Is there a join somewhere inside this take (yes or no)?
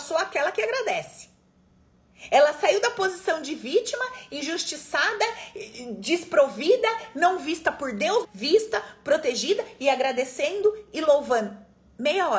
yes